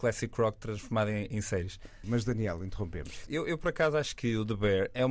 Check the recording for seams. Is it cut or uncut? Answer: cut